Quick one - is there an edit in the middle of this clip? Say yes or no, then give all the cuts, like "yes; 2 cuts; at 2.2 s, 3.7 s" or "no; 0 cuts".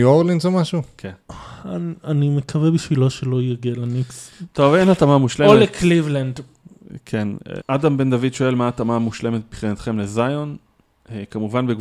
yes; 1 cut; at 7.6 s